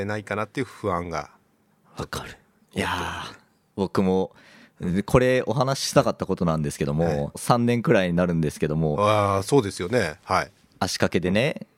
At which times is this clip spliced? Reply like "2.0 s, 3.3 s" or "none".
7.3 s